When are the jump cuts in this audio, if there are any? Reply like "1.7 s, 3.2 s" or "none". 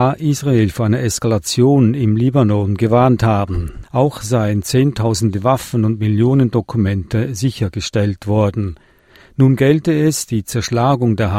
3.8 s